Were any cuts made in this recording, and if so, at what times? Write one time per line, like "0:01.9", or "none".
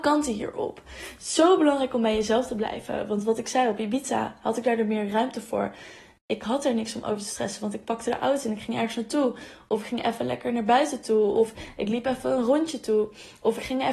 none